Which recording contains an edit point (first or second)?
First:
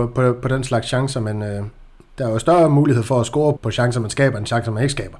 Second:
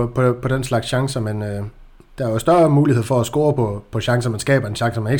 first